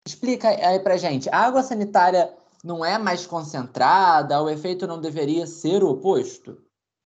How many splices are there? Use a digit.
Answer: 0